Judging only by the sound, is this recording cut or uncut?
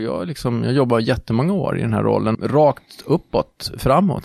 cut